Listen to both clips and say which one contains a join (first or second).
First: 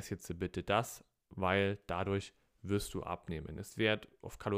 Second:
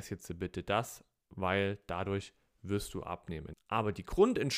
second